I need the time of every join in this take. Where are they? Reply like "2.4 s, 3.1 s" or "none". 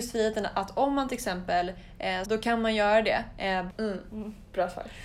2.2 s, 3.7 s